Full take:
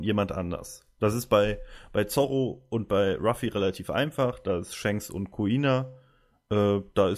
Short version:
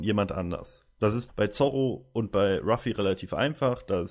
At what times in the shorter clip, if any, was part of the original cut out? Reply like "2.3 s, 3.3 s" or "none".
1.3 s